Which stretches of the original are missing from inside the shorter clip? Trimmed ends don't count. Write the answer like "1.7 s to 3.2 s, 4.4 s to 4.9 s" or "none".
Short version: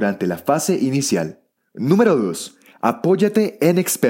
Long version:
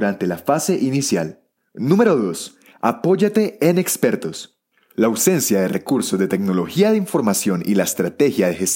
none